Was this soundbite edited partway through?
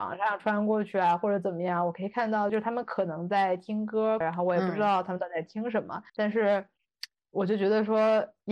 yes; 3 cuts; at 2.5 s, 4.2 s, 6.1 s

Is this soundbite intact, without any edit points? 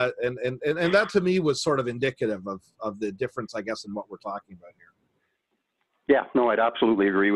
yes; 0 cuts

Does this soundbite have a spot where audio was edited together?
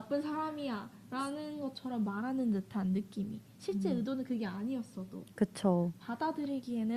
no; 0 cuts

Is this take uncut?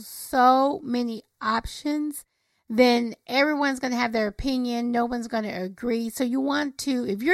yes; 0 cuts

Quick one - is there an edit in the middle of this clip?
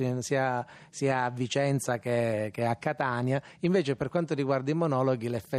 no; 0 cuts

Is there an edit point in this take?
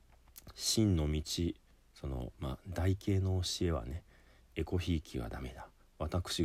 no; 0 cuts

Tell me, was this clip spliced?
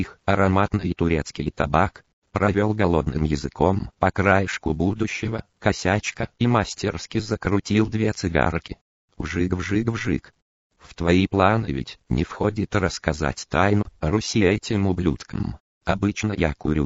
yes; 1 cut; at 10.6 s

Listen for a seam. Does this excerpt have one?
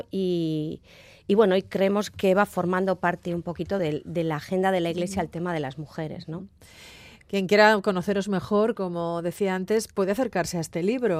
no; 0 cuts

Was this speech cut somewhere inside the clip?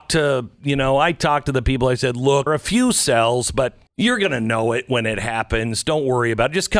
yes; 2 cuts; at 2.5 s, 3.9 s

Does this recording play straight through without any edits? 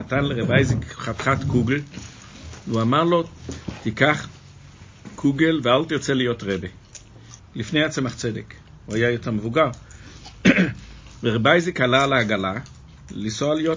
no; 1 cut; at 7.4 s

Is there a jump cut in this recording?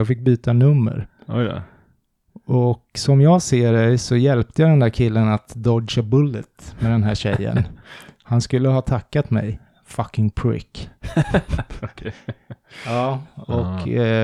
no; 0 cuts

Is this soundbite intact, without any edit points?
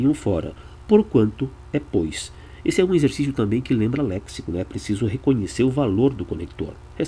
yes; 0 cuts

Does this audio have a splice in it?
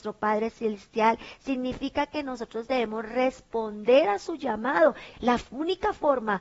yes; 1 cut; at 5.1 s

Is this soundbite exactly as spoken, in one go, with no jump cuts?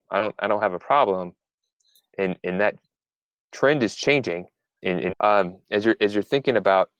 no; 1 cut; at 5.1 s

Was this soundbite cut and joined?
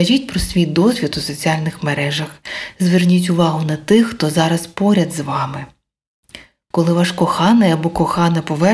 yes; 1 cut; at 6.7 s

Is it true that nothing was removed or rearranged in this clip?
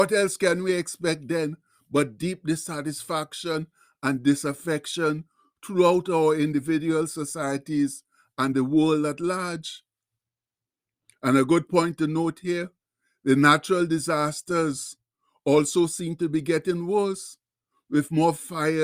yes; 0 cuts

